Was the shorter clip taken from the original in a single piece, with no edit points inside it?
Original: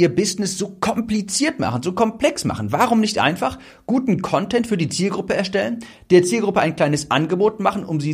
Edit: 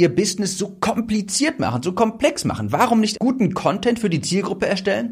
no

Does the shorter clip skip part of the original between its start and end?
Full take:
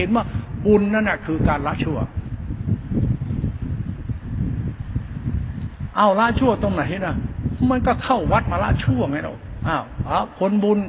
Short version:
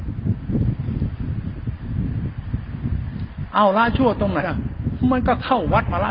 yes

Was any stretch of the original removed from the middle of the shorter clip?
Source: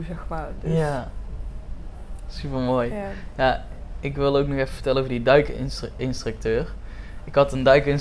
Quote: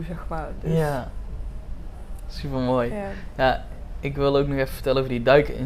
no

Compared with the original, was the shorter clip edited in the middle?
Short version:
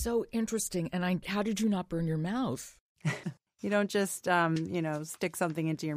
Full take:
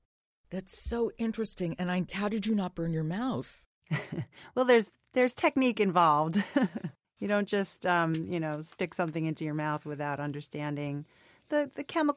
yes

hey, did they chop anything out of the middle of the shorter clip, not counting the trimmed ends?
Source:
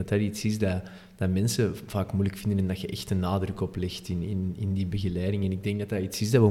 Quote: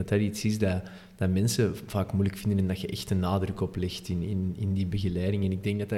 no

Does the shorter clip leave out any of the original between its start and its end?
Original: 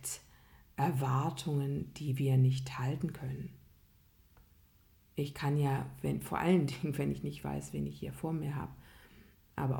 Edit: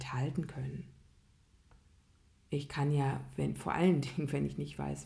no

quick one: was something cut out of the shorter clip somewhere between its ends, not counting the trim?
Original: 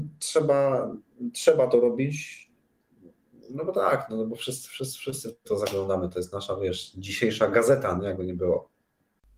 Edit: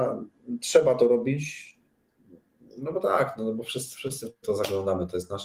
yes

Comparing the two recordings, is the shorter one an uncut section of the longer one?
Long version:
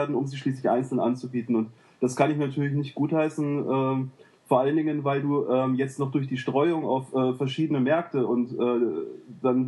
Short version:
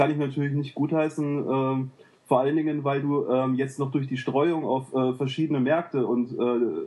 yes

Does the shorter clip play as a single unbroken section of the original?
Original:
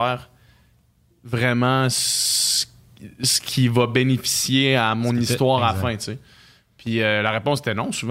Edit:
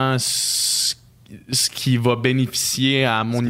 yes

